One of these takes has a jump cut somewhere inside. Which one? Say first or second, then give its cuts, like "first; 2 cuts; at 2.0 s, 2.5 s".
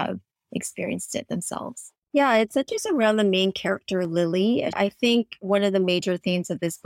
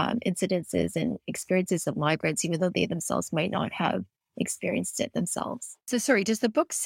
first; 2 cuts; at 2.0 s, 4.7 s